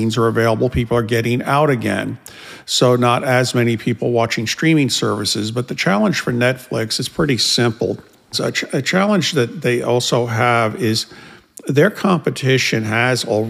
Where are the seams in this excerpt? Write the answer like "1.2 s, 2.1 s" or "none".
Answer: 8.3 s